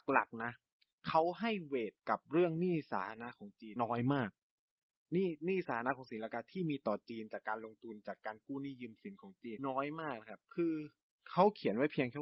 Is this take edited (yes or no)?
yes